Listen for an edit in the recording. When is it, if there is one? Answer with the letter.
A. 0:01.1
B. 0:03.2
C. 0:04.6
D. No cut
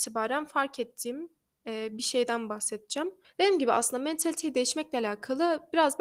B